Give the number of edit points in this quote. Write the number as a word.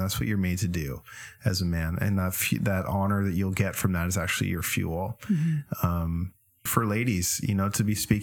one